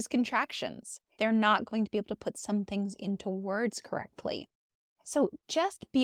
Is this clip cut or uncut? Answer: cut